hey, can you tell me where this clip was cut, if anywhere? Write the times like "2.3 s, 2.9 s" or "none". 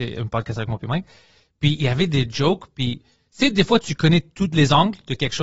3.8 s